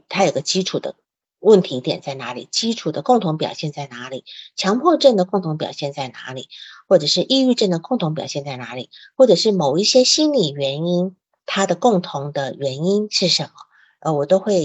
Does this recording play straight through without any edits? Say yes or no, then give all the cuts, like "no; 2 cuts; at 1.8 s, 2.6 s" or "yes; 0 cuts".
yes; 0 cuts